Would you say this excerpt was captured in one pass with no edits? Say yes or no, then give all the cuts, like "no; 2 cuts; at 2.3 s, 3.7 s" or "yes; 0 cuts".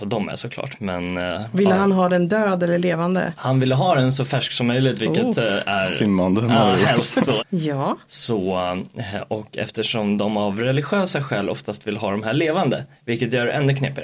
no; 1 cut; at 7.4 s